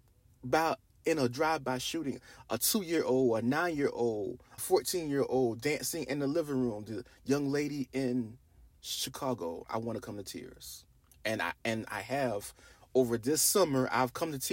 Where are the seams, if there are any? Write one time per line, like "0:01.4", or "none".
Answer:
0:04.6